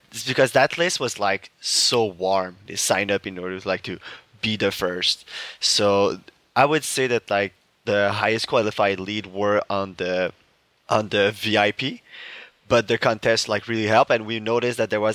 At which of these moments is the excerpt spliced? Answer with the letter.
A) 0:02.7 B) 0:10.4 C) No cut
A